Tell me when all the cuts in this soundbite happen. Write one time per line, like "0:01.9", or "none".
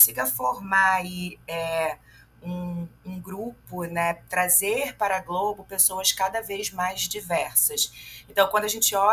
none

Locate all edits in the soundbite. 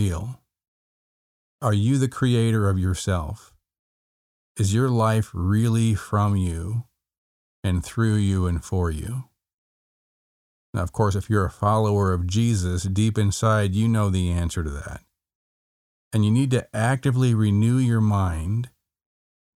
none

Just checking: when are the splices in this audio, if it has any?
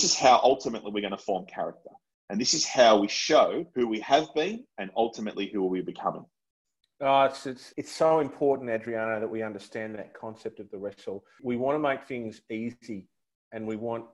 none

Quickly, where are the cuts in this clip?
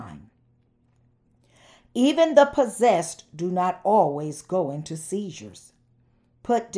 none

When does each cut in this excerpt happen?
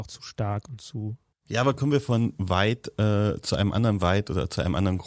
none

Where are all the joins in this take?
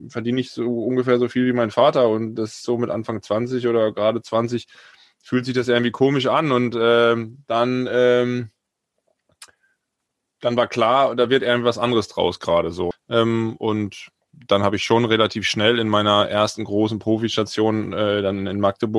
0:12.9

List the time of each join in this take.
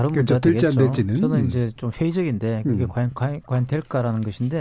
none

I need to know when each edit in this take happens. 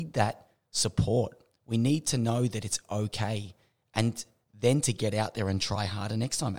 none

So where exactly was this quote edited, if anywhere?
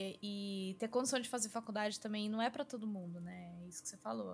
none

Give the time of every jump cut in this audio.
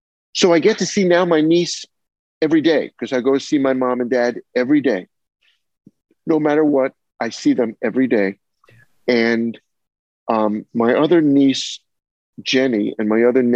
none

